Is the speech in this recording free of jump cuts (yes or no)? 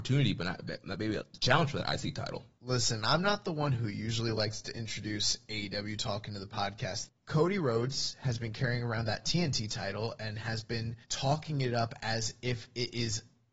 no